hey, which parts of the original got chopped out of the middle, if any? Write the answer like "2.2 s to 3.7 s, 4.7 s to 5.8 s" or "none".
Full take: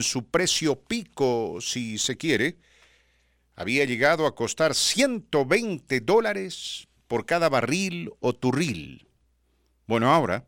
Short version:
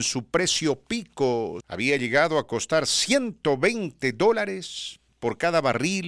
1.6 s to 3.5 s